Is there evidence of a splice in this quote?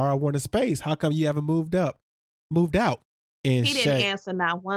no; 0 cuts

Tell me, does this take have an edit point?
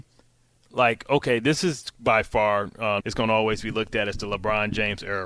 yes; 1 cut; at 3.0 s

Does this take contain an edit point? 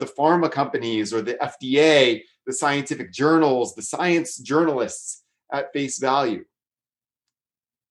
no; 0 cuts

